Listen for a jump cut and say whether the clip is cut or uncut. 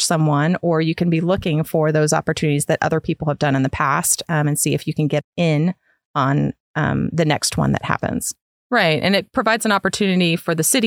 cut